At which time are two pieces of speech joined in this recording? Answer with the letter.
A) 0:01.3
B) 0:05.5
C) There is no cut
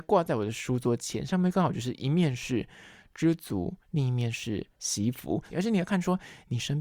B